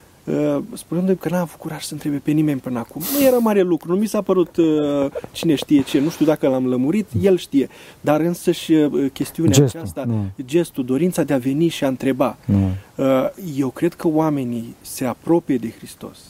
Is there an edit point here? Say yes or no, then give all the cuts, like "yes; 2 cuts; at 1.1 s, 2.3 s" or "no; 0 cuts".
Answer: no; 0 cuts